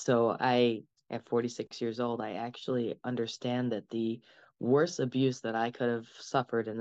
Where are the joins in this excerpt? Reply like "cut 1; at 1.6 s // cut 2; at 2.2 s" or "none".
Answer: cut 1; at 0.9 s